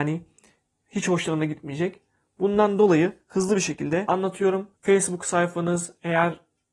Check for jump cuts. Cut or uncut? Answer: cut